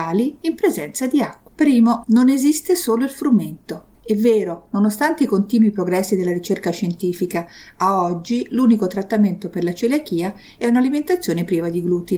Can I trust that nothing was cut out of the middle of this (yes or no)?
no